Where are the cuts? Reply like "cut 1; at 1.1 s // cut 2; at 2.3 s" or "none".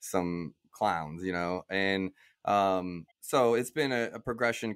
cut 1; at 3.1 s